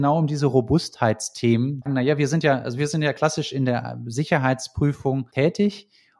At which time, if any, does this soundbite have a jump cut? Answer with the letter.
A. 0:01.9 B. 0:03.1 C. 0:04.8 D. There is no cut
A